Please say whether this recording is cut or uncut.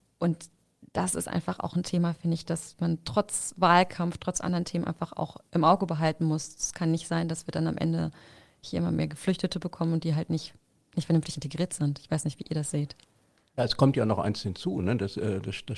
uncut